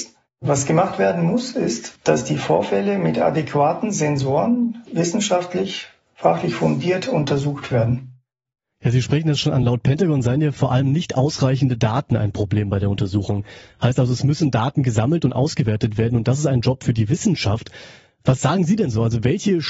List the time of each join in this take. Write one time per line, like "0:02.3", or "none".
none